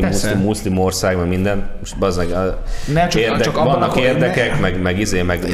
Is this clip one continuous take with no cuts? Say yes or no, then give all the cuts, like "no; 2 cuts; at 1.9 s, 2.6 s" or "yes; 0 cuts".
yes; 0 cuts